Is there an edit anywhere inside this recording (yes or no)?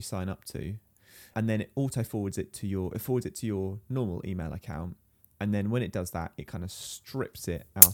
yes